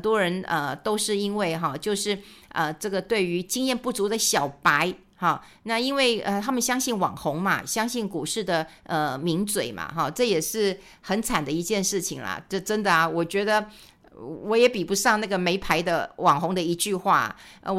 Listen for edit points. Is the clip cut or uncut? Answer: uncut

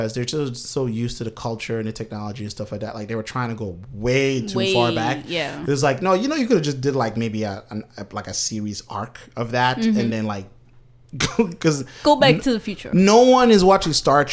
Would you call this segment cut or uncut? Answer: uncut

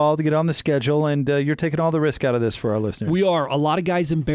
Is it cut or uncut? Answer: uncut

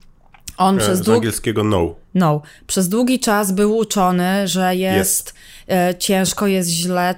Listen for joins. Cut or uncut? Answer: uncut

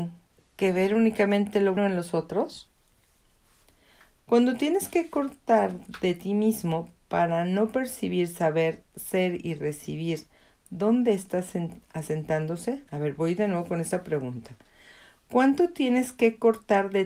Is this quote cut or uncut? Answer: cut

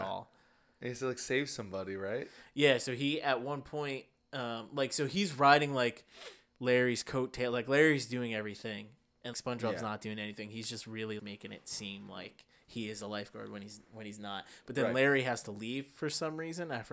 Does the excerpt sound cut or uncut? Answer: cut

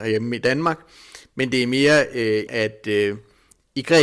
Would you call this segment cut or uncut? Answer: cut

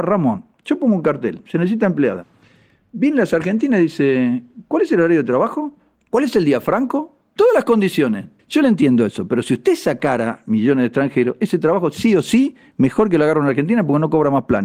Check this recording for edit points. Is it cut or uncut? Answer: cut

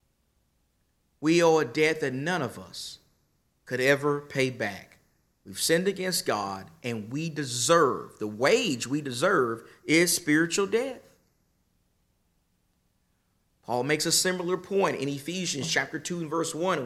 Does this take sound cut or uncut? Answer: uncut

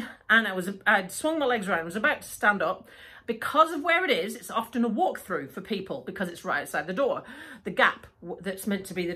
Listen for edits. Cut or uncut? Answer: uncut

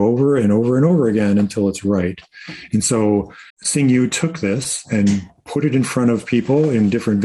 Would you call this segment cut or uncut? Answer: cut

